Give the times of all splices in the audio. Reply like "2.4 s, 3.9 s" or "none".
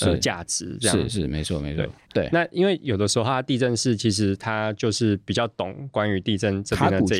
2.1 s